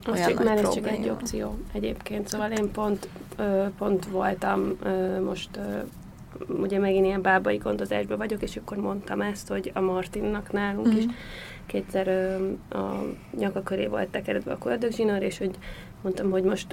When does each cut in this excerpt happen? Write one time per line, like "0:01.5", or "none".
none

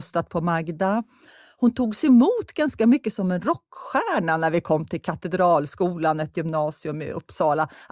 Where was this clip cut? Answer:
none

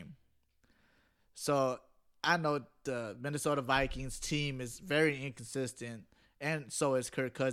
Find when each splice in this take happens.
none

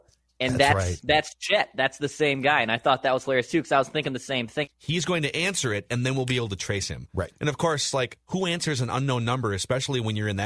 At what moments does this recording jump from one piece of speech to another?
0:04.7

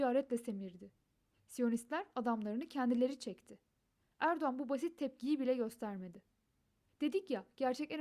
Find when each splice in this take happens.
0:01.4
0:06.9

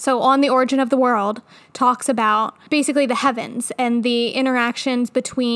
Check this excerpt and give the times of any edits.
none

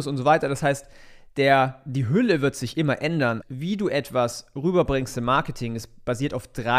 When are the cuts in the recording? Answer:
0:03.4

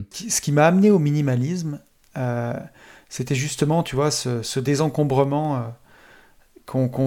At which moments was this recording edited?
none

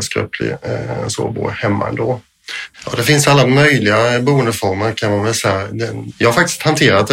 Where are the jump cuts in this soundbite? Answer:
0:02.7
0:06.1

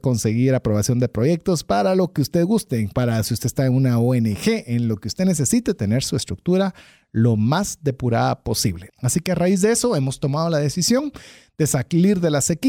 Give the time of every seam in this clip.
0:08.9

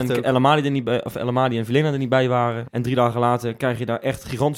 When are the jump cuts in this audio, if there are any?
0:02.6

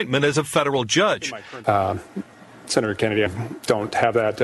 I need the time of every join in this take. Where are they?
0:01.6
0:03.3

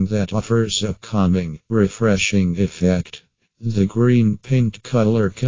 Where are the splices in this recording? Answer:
0:03.5

